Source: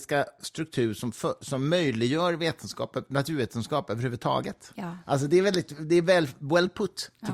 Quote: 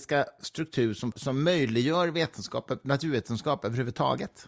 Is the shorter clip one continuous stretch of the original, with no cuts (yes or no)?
no